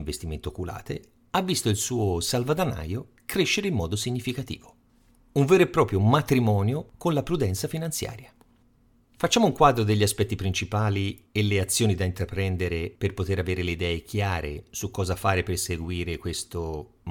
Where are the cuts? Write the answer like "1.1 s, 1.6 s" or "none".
none